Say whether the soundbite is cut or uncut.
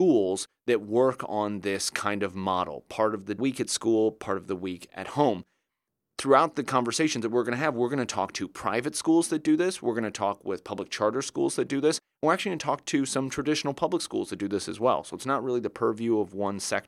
uncut